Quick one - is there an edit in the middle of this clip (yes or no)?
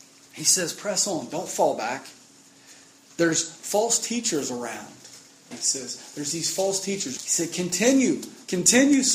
yes